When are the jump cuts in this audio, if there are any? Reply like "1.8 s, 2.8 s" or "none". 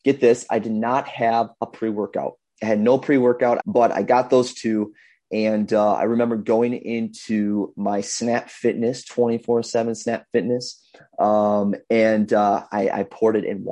3.6 s

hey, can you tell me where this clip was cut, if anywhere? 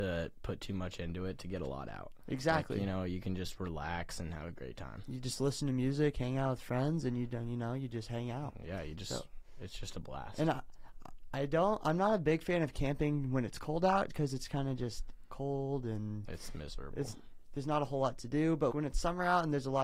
14.1 s, 16.2 s, 18.7 s

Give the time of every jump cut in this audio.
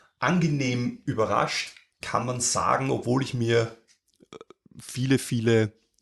none

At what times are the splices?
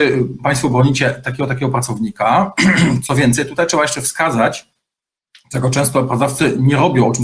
none

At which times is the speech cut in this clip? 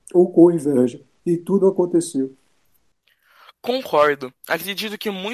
none

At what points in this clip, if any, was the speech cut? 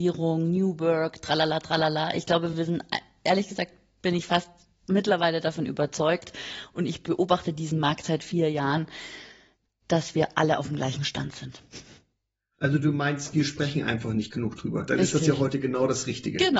none

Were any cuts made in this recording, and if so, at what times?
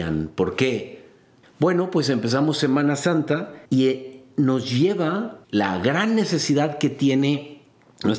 1.4 s, 3.7 s, 5.4 s

